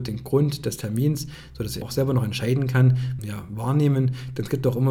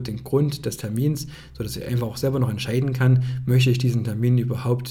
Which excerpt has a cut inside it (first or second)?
first